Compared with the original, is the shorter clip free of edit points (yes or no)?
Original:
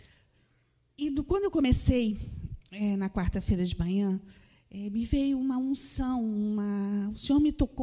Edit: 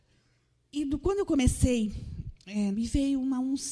no